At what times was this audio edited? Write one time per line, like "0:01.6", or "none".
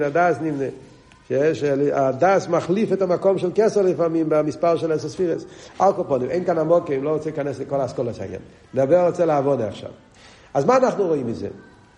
none